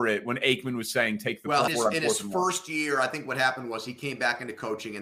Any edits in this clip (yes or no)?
yes